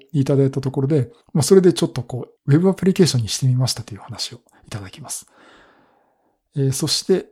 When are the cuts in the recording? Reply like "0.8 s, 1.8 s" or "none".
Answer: 1.2 s, 2.4 s